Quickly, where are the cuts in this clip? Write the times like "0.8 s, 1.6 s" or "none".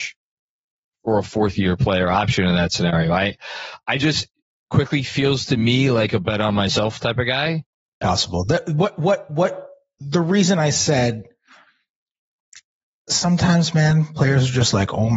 8.0 s